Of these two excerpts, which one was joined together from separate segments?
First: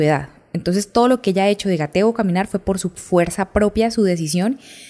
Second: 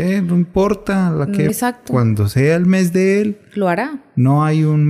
second; 1 cut; at 1.5 s

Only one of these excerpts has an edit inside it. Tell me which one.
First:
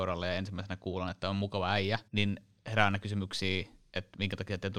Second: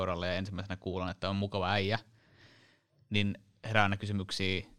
first; 1 cut; at 2.1 s

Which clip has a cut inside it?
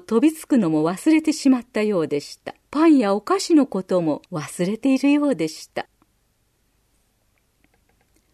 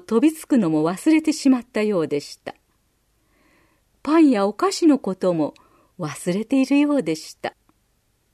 first; 2 cuts; at 2.6 s, 4.3 s

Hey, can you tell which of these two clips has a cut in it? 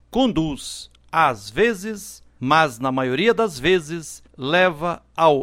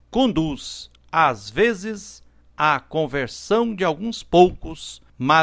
first; 1 cut; at 2.4 s

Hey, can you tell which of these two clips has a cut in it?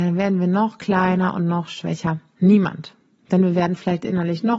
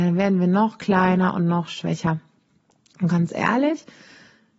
first; 1 cut; at 2.4 s

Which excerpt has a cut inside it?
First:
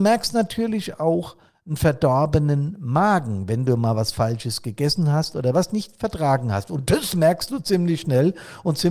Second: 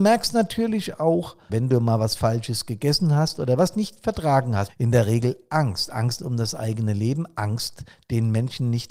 second; 2 cuts; at 1.5 s, 4.7 s

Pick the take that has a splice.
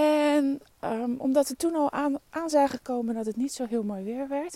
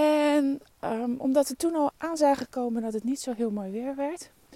second; 1 cut; at 1.9 s

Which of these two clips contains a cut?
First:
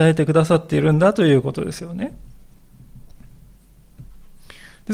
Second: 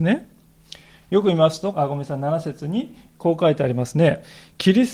second; 1 cut; at 1.7 s

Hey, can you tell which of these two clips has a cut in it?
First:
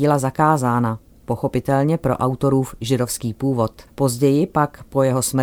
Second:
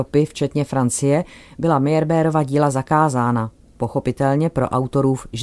first; 1 cut; at 3.9 s

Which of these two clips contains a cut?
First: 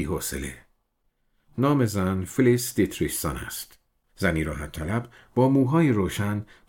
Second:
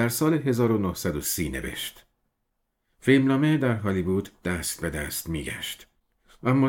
first; 1 cut; at 4.1 s

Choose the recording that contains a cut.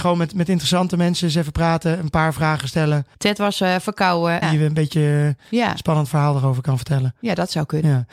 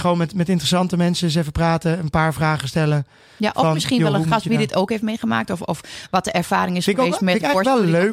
first; 2 cuts; at 3.1 s, 4.4 s

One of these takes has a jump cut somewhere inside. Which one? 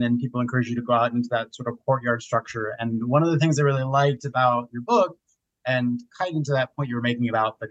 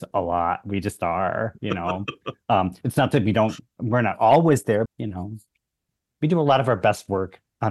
second; 1 cut; at 4.9 s

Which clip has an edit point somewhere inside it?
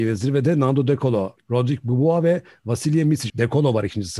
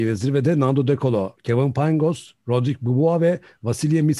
first; 2 cuts; at 1.4 s, 3.3 s

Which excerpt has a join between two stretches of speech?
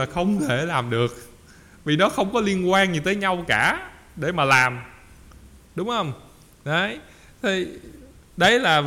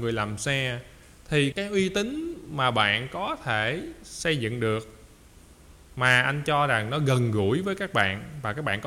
second; 1 cut; at 1.5 s

